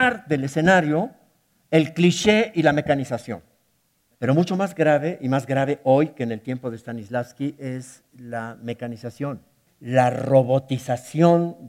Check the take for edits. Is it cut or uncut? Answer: cut